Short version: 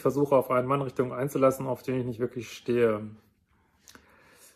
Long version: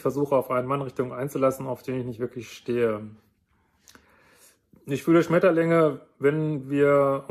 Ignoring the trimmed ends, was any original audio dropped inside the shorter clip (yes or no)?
no